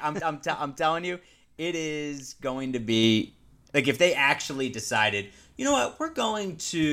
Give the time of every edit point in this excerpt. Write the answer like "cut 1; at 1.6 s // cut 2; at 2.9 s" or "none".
none